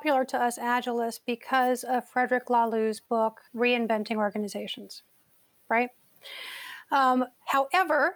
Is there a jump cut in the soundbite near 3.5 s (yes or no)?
yes